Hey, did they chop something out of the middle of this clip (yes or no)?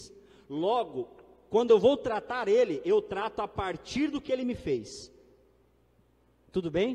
no